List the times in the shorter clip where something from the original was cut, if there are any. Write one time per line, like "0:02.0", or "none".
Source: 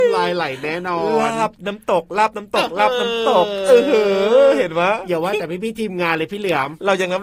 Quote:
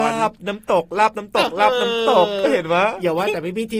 0:02.4